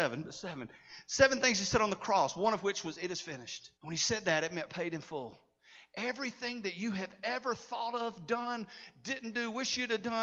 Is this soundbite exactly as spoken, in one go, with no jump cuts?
no; 1 cut; at 3.8 s

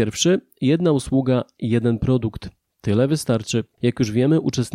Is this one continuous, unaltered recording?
yes; 0 cuts

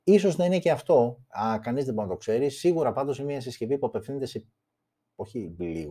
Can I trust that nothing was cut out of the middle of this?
yes; 0 cuts

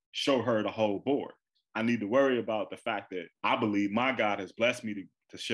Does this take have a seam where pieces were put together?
yes; 2 cuts; at 1.6 s, 3.3 s

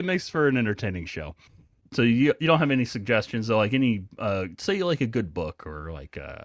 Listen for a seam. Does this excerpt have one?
no; 0 cuts

